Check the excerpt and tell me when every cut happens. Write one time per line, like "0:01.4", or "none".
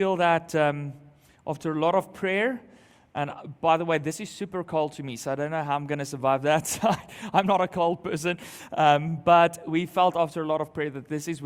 none